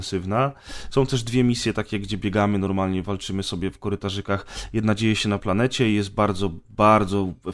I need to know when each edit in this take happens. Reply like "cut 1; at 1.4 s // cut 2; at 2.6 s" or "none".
none